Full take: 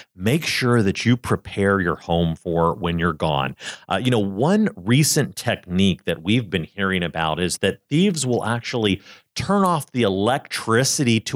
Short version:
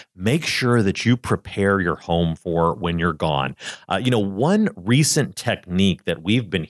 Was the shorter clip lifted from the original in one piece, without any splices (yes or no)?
yes